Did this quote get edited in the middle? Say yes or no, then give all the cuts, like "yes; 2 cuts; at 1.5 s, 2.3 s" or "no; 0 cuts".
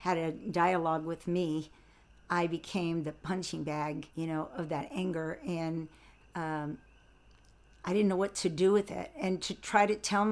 yes; 1 cut; at 4.1 s